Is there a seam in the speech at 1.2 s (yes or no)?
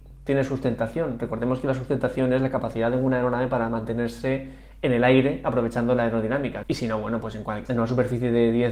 no